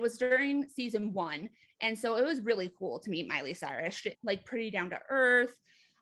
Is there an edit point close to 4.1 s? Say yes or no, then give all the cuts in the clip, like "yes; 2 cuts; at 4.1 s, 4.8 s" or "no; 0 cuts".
yes; 1 cut; at 4.1 s